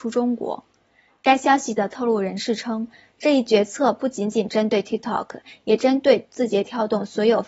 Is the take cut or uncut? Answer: uncut